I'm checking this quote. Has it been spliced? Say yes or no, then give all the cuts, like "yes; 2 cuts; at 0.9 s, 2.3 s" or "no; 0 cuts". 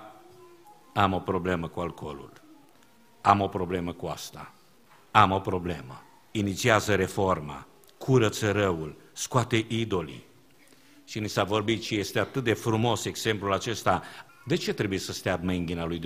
yes; 2 cuts; at 6.3 s, 14.3 s